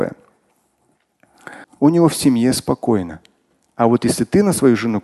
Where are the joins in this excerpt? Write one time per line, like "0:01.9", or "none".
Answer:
0:01.6